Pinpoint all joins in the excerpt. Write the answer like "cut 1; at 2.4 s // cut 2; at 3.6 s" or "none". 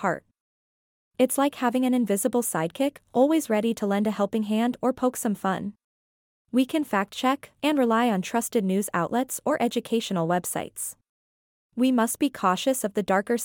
cut 1; at 6.4 s // cut 2; at 7.6 s // cut 3; at 11.7 s